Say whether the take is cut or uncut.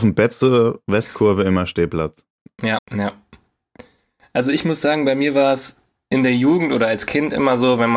cut